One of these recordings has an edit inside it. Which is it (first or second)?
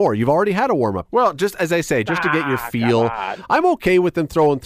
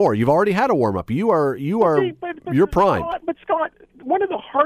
first